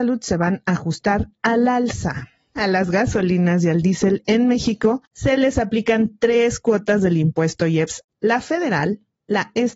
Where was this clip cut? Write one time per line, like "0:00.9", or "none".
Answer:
none